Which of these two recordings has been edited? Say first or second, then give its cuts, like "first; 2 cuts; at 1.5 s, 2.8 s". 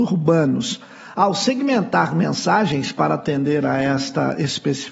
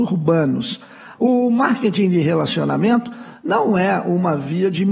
second; 1 cut; at 1.1 s